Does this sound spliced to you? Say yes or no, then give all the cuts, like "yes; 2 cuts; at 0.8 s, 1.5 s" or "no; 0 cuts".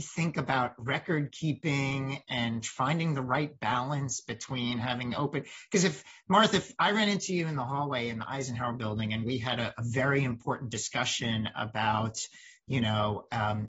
no; 0 cuts